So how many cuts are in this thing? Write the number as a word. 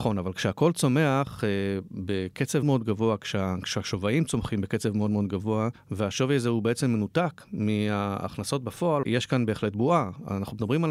two